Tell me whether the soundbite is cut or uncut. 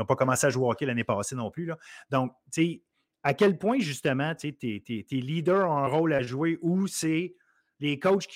uncut